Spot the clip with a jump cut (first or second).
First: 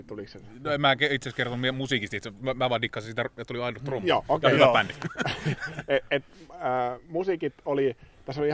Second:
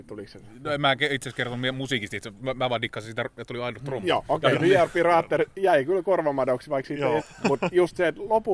second